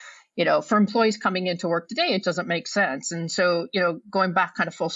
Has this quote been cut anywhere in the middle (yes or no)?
yes